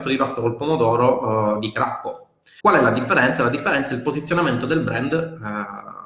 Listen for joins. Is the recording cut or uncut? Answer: cut